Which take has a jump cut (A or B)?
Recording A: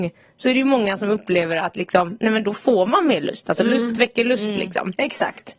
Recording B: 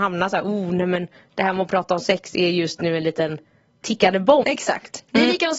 B